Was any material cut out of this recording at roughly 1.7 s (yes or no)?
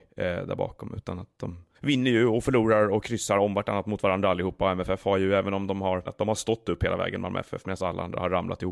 yes